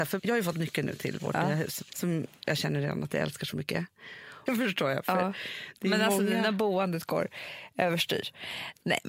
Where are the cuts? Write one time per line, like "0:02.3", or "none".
0:01.9
0:04.5